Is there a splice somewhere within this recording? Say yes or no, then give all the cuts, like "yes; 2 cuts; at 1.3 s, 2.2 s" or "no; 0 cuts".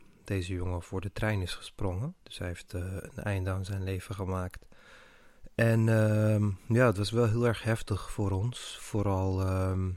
yes; 1 cut; at 2.2 s